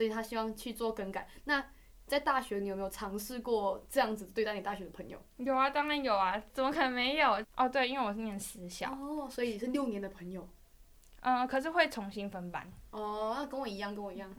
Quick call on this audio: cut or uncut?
cut